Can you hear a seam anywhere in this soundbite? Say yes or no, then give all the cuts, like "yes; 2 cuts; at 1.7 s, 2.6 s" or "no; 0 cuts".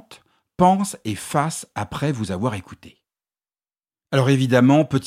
no; 0 cuts